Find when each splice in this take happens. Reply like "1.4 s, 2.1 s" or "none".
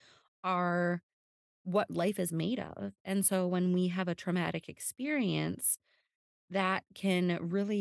none